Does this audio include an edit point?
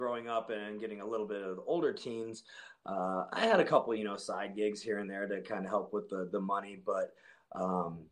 no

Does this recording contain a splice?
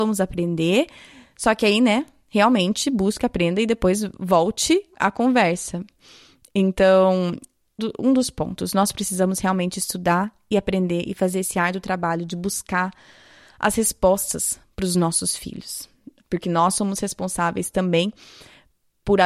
yes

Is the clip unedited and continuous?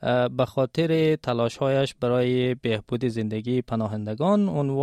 yes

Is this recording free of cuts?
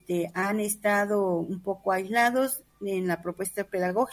yes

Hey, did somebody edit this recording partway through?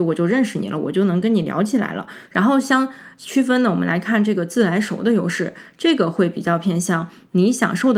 yes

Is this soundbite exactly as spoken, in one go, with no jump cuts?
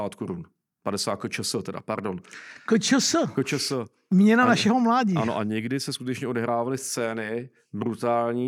yes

